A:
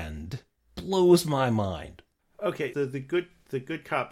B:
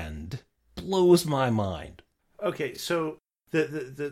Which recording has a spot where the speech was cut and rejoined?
A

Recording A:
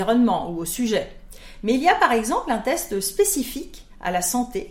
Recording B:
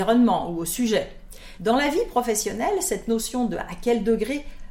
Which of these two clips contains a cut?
B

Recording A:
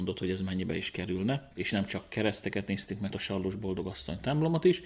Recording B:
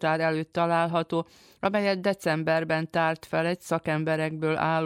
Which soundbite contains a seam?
A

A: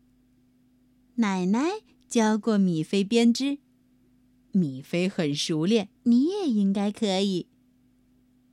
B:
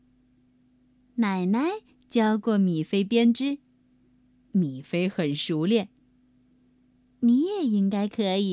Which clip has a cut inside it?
A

